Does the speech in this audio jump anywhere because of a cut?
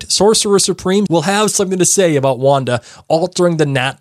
yes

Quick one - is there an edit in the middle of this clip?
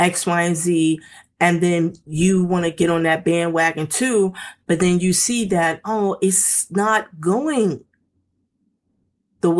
no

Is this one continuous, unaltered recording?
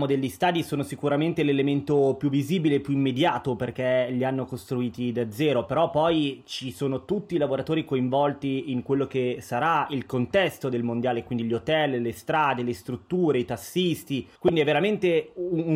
no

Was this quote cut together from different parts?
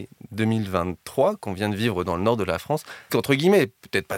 yes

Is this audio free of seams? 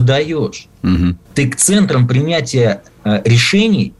no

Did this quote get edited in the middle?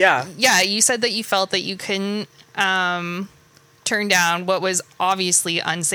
no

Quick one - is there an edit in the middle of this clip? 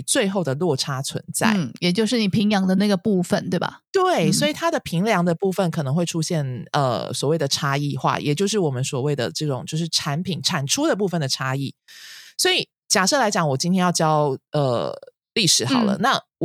yes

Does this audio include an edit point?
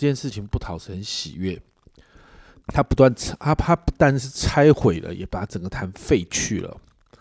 yes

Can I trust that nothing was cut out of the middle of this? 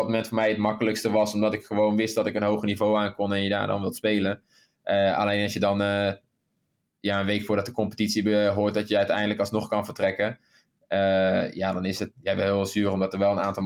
no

